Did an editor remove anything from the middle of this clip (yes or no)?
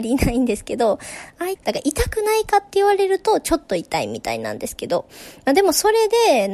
yes